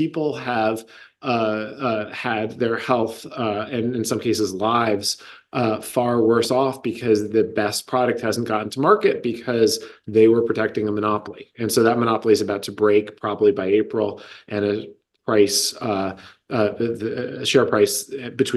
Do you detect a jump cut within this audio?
no; 0 cuts

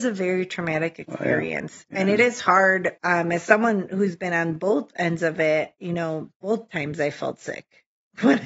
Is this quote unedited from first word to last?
no; 2 cuts; at 3.0 s, 5.8 s

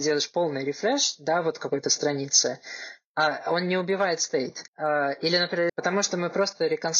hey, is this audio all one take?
no; 2 cuts; at 4.7 s, 5.7 s

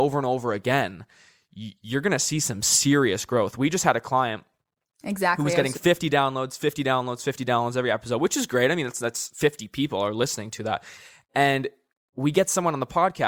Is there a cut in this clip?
no; 0 cuts

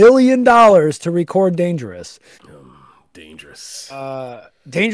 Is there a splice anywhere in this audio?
yes; 1 cut; at 2.3 s

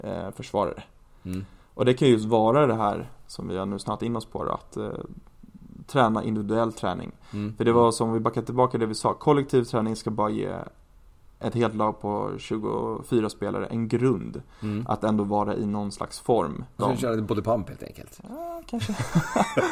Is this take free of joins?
no; 1 cut; at 16.8 s

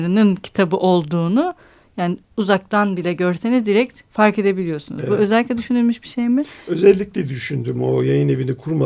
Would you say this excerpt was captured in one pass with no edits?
yes; 0 cuts

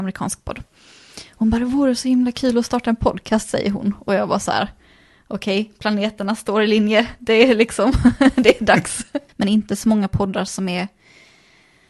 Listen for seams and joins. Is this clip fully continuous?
no; 1 cut; at 9.3 s

